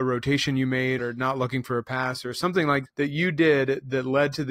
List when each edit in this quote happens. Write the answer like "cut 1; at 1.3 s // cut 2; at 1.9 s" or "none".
cut 1; at 1.0 s // cut 2; at 2.9 s